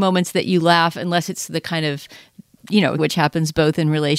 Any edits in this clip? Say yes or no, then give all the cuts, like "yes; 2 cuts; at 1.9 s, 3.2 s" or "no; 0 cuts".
yes; 1 cut; at 3.0 s